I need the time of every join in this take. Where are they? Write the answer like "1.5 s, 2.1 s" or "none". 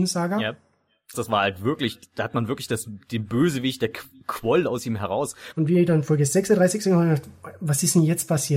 1.1 s, 5.5 s